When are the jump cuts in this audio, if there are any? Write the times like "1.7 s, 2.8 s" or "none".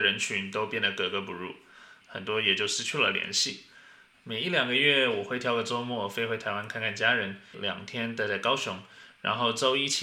2.0 s, 4.1 s, 7.5 s